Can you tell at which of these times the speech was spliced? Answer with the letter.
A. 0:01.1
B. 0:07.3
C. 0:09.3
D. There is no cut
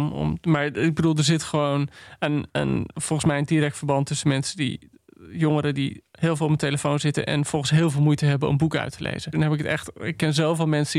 C